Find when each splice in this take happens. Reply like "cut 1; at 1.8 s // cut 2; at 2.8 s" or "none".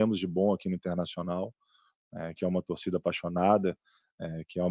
cut 1; at 2.4 s